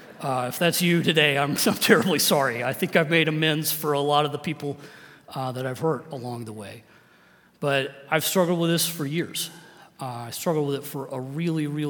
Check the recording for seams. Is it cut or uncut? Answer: uncut